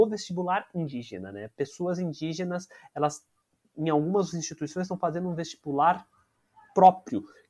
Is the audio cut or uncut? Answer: uncut